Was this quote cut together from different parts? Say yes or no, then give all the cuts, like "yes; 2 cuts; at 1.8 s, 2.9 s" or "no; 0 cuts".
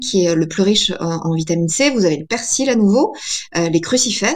no; 0 cuts